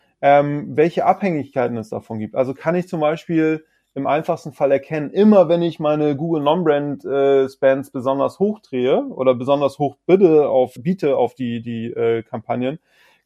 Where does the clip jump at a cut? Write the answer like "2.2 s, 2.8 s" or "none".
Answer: 10.8 s